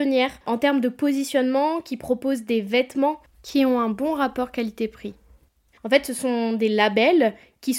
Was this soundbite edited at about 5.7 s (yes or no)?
yes